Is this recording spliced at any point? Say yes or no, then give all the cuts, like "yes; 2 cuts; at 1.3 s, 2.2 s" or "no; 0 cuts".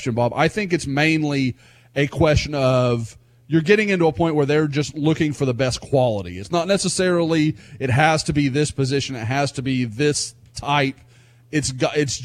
no; 0 cuts